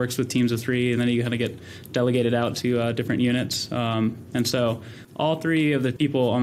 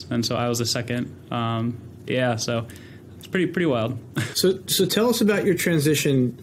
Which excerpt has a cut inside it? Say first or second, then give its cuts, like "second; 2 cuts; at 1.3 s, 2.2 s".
second; 2 cuts; at 3.1 s, 4.3 s